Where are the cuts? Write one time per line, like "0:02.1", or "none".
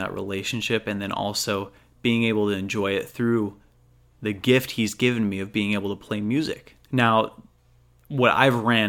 0:06.9